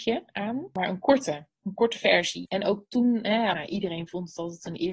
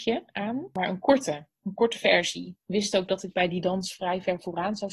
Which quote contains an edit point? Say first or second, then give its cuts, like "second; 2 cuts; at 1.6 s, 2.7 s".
first; 2 cuts; at 2.5 s, 3.5 s